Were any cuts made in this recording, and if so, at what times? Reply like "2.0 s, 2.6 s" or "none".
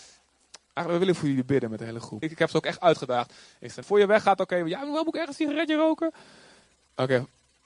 2.2 s, 3.8 s